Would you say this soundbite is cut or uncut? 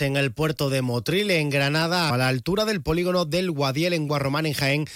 cut